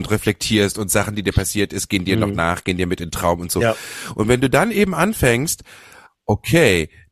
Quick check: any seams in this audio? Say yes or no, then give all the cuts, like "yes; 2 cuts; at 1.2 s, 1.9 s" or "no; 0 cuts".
no; 0 cuts